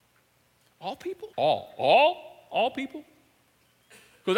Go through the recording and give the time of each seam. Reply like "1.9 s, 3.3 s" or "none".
1.3 s